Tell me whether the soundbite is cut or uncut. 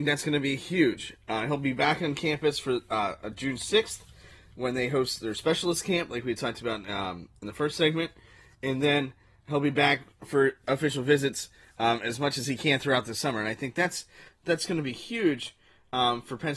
uncut